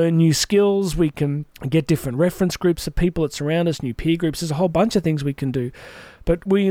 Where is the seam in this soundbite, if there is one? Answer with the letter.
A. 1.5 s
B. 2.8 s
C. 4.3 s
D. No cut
A